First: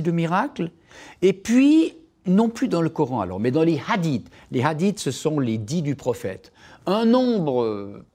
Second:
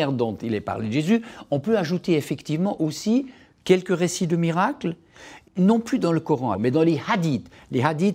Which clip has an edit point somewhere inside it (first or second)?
second